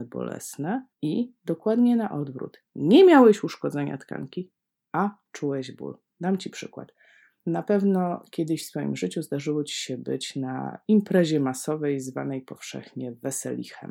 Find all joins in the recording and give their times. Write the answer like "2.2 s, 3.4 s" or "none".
0.9 s